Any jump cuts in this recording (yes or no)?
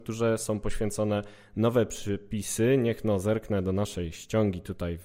no